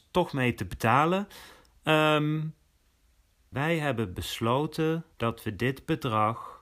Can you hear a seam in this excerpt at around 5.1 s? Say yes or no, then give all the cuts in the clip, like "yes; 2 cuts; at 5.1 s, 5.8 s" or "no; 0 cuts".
yes; 2 cuts; at 3.5 s, 5.1 s